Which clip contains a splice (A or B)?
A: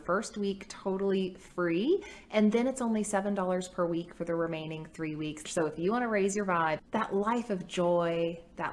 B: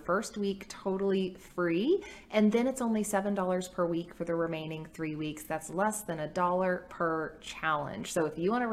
A